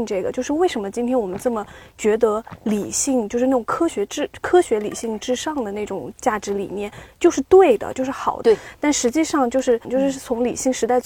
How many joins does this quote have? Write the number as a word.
two